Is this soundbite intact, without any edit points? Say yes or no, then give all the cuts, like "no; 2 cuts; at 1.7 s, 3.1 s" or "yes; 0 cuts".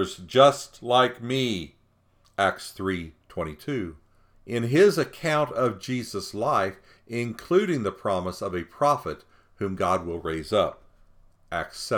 no; 2 cuts; at 4.3 s, 7.0 s